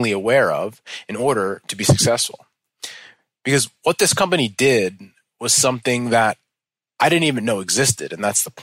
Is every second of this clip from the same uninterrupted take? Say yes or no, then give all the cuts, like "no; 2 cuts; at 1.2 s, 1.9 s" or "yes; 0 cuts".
yes; 0 cuts